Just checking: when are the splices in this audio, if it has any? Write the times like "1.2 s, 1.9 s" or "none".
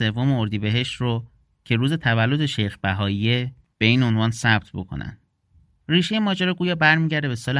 none